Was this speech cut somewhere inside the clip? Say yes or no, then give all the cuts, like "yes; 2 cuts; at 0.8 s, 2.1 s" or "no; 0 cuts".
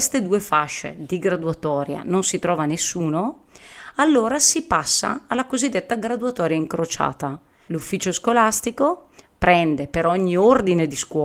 yes; 1 cut; at 7.7 s